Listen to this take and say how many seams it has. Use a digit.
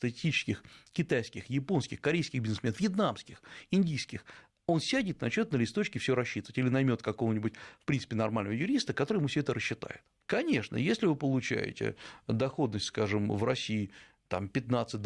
1